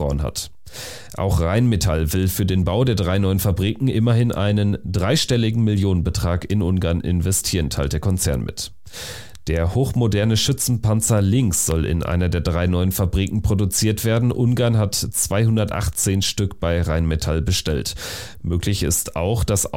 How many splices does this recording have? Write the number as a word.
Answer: zero